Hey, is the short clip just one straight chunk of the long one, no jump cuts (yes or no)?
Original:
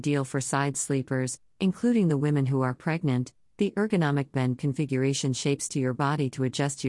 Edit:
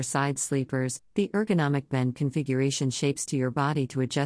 no